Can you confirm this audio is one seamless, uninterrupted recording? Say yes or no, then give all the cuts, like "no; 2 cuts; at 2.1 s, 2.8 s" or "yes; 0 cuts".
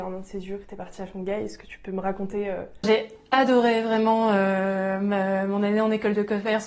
no; 1 cut; at 2.8 s